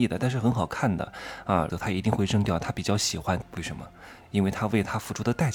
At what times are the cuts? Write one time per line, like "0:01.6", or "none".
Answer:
0:01.7
0:03.4